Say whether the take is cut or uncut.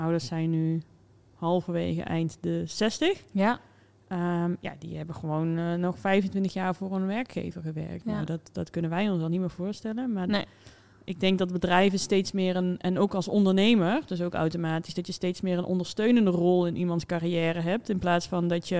uncut